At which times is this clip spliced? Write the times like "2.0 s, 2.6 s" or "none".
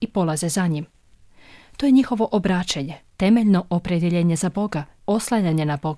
3.1 s, 5.0 s

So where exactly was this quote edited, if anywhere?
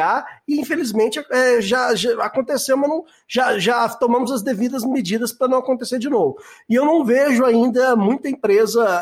none

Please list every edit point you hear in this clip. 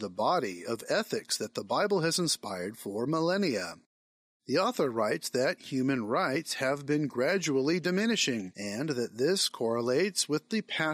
4.4 s

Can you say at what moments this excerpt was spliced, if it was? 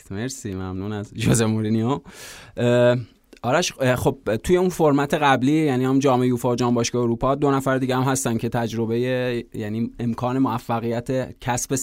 none

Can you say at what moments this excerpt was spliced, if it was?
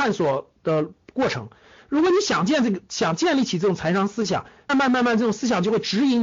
4.7 s

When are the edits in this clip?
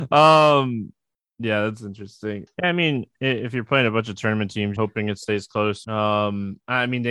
2.5 s, 4.8 s, 5.8 s

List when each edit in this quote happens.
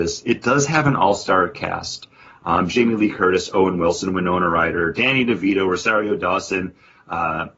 none

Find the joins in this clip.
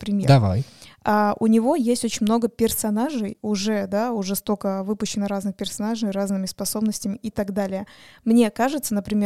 none

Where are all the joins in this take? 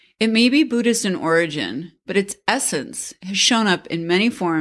none

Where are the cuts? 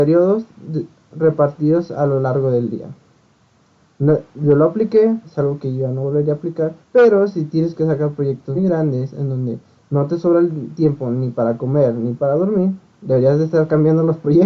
5.2 s, 6.8 s, 8.5 s

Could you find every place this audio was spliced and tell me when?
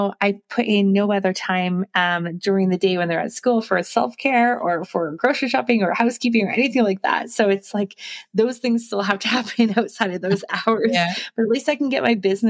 none

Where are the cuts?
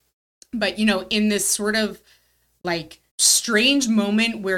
3.1 s

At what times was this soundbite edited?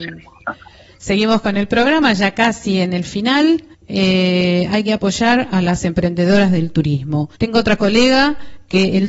3.7 s, 7.3 s

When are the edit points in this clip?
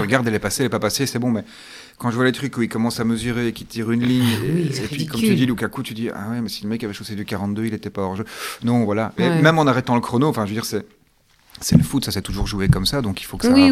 none

